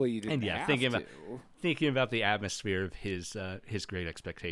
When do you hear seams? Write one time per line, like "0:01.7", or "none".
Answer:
none